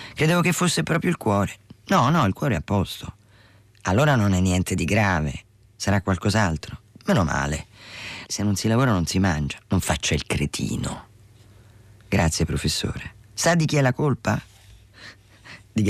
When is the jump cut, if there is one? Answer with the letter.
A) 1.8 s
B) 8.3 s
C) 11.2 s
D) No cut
B